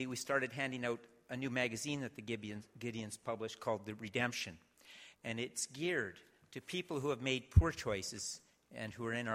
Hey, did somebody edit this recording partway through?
yes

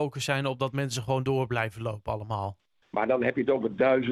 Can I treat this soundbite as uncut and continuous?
no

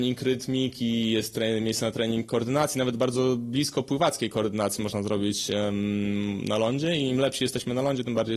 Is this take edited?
no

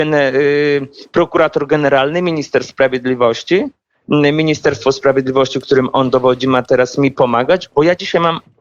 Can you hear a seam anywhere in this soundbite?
no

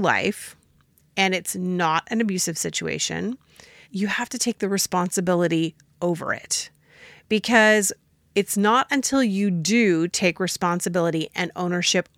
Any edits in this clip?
yes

